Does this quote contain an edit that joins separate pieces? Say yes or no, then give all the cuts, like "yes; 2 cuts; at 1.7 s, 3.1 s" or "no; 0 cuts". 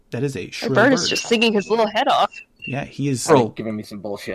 yes; 1 cut; at 3.3 s